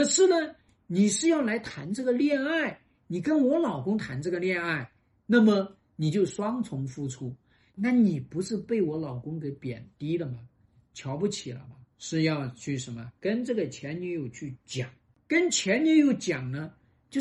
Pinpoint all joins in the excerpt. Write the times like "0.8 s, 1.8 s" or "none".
7.7 s, 11.9 s